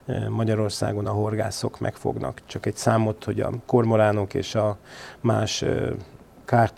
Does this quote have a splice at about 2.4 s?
no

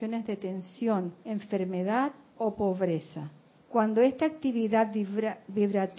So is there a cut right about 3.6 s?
yes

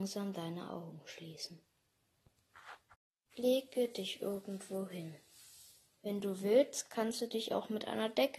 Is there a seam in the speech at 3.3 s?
yes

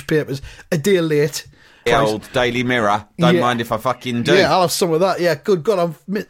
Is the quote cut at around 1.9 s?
yes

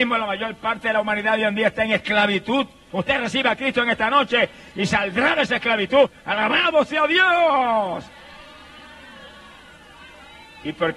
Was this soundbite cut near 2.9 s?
yes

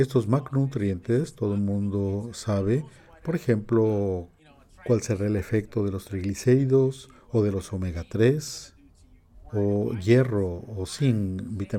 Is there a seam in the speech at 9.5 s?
no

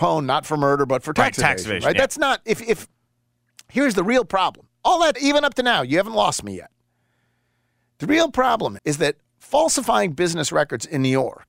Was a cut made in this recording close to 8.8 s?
yes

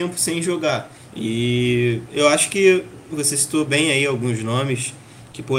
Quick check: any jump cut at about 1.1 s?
yes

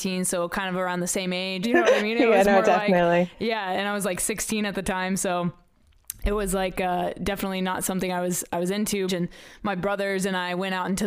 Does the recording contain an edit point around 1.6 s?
yes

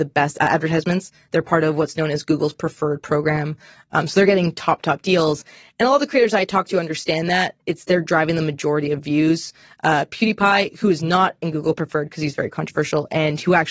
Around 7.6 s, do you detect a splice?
no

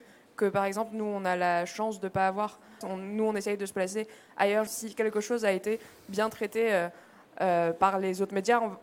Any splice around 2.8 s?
yes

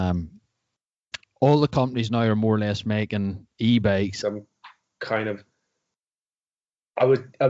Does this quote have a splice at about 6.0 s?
no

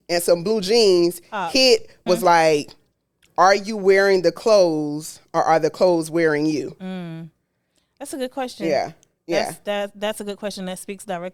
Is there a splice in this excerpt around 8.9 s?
no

